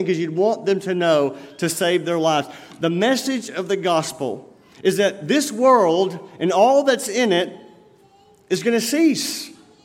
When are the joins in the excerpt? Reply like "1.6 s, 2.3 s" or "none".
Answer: none